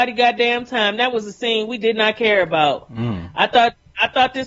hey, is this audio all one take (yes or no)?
yes